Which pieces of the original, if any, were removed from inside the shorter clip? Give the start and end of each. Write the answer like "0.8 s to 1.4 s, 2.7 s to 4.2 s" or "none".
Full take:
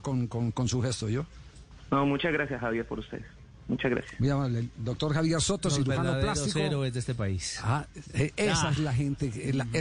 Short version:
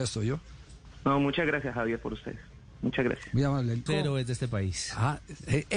4.7 s to 6.5 s